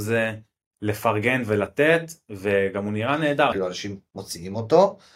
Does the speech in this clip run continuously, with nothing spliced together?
no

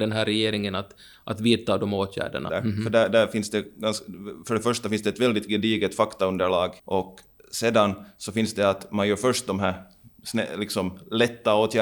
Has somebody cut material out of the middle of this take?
yes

